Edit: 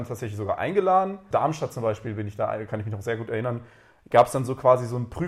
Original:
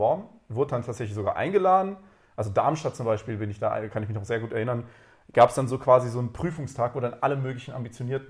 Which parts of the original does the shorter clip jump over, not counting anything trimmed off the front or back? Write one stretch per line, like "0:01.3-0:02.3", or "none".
0:02.1-0:02.5